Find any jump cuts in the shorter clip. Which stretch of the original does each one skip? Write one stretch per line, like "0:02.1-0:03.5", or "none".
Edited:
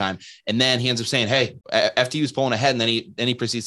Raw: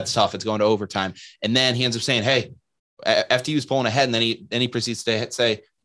0:02.6-0:02.9